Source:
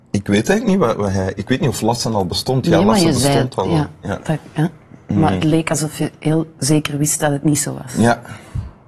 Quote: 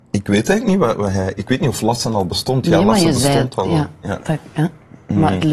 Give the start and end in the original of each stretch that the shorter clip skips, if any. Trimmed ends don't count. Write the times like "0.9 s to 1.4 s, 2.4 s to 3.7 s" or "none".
none